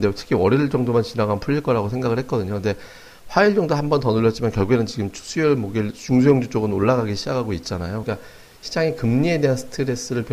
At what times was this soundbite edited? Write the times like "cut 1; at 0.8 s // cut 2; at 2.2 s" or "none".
cut 1; at 8.0 s